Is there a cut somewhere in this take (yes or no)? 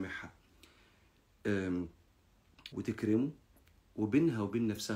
yes